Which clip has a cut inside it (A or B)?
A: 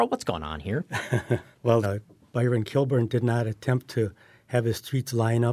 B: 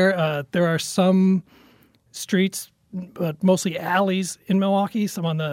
A